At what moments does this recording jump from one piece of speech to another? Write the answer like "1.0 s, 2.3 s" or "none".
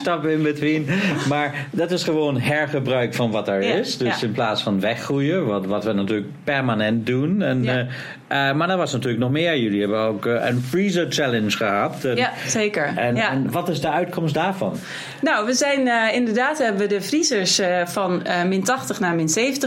none